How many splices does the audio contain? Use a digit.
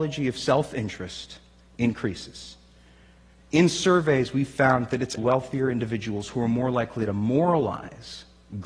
1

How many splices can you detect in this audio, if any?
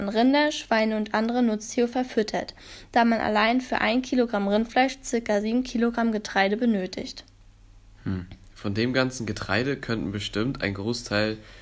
0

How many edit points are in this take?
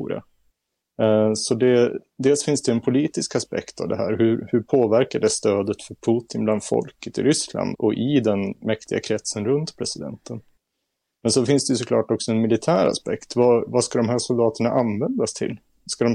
1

